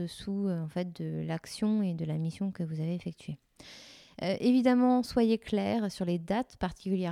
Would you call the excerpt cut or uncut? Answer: uncut